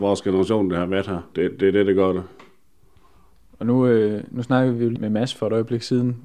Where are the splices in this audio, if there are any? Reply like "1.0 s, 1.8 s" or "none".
1.3 s, 5.0 s